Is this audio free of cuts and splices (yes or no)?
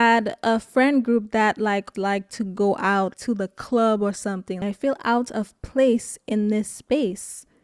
no